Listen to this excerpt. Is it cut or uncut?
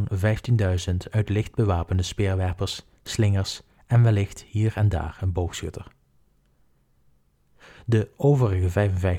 uncut